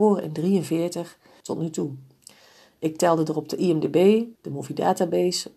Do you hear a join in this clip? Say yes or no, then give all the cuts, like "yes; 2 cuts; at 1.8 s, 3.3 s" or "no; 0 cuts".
yes; 2 cuts; at 1.4 s, 4.4 s